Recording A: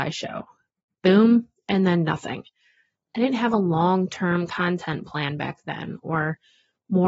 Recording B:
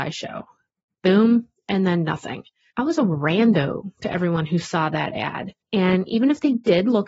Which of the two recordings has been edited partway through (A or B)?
B